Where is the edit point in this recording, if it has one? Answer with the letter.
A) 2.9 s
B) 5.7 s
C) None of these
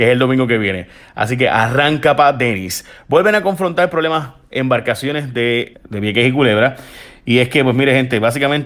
B